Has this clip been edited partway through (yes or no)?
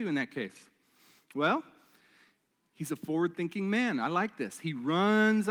no